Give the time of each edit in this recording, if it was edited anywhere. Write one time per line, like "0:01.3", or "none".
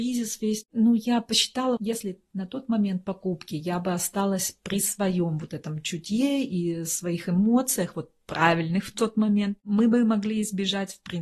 0:01.8